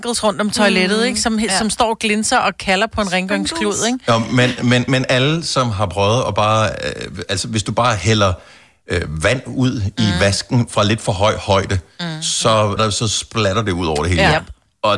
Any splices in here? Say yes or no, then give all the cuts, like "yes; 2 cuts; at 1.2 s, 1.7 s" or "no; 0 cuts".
yes; 2 cuts; at 4.9 s, 12.8 s